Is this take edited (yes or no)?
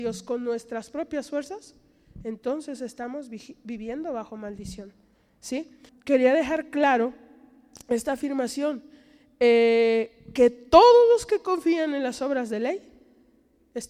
yes